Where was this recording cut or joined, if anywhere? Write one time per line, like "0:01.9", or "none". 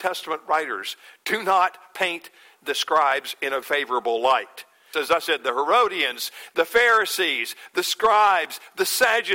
0:03.6
0:04.9